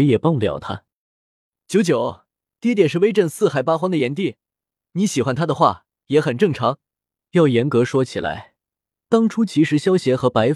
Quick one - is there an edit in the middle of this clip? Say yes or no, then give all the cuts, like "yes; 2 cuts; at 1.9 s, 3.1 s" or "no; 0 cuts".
yes; 2 cuts; at 2.6 s, 7.2 s